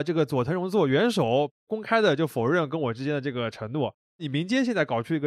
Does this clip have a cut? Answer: yes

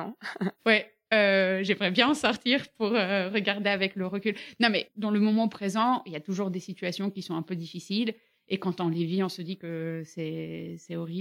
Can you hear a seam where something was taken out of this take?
no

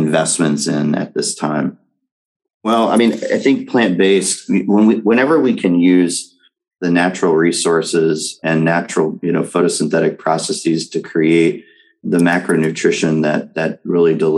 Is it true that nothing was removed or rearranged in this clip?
no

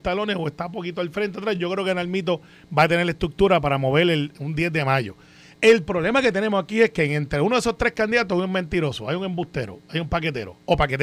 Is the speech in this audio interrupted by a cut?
no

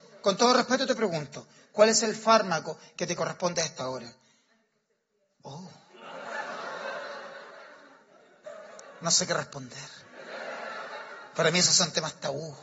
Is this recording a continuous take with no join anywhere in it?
yes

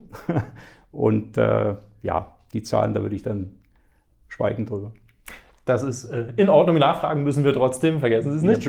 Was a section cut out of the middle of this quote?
no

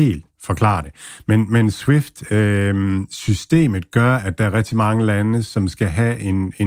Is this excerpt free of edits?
yes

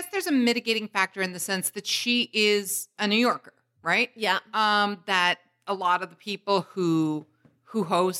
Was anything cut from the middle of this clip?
no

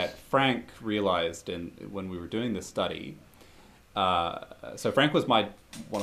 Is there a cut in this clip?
no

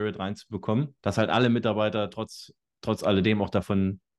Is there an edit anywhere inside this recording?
yes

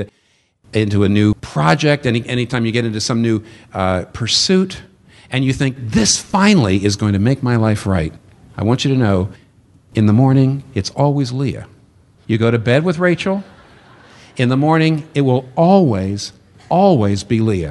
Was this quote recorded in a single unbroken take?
yes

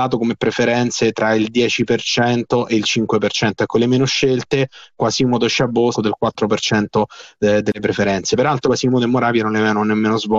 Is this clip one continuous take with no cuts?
no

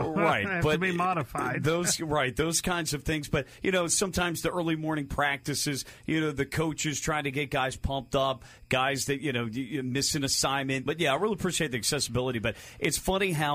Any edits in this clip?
yes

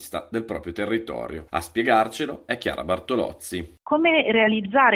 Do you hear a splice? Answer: no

